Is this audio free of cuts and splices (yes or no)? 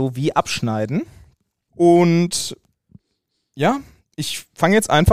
no